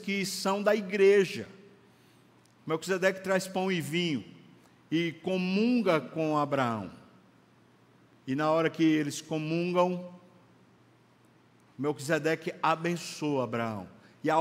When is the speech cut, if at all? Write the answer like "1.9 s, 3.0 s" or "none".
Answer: none